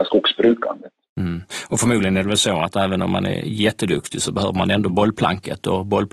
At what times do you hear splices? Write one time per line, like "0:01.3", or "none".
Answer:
none